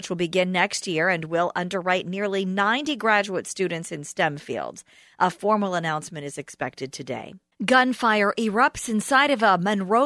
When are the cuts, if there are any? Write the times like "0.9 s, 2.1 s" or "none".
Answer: none